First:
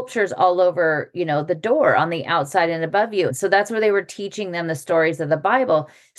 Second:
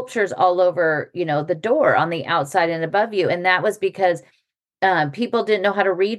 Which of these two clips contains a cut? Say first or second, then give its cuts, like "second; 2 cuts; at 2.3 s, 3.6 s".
first; 1 cut; at 3.3 s